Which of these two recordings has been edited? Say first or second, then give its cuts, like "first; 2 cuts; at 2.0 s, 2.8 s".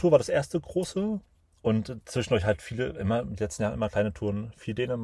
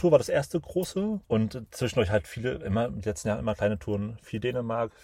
second; 1 cut; at 1.2 s